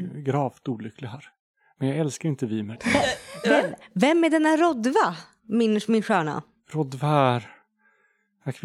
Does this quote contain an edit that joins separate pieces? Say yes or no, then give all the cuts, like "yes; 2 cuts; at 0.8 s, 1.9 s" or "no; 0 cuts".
yes; 1 cut; at 2.7 s